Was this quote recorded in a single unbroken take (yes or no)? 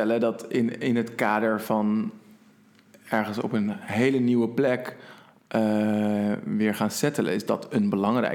yes